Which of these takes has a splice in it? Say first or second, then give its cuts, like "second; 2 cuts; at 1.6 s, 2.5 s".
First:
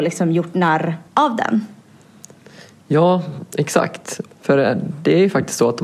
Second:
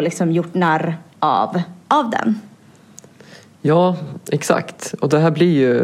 first; 2 cuts; at 1.1 s, 4.3 s